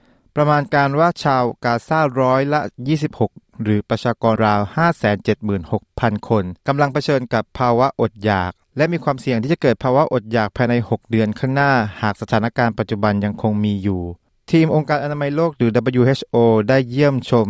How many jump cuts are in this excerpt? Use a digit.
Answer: 2